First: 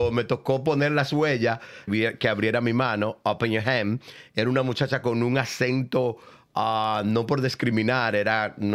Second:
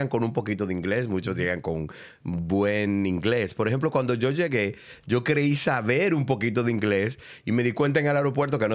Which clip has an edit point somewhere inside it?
first; 1 cut; at 1.9 s

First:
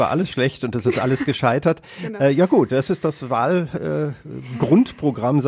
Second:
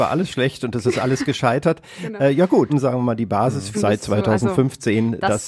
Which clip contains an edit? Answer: second; 2 cuts; at 2.7 s, 3.7 s

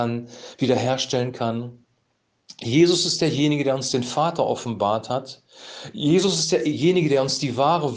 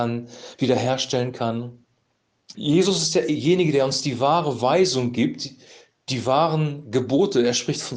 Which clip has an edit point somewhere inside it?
second; 1 cut; at 2.5 s

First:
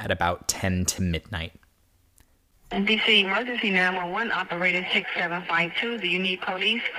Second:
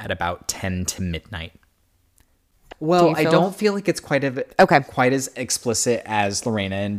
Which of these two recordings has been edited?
second; 1 cut; at 2.7 s

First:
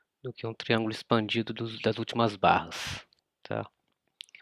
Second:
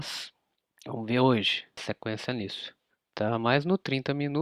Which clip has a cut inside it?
second; 1 cut; at 1.8 s

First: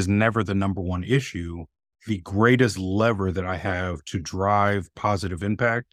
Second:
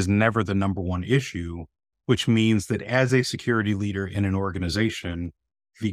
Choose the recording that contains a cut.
first; 1 cut; at 1.9 s

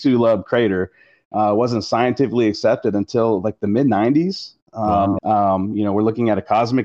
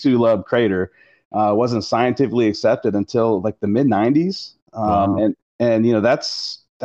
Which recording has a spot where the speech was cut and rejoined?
first; 1 cut; at 5.2 s

